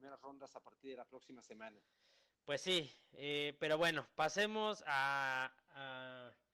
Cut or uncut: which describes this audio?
uncut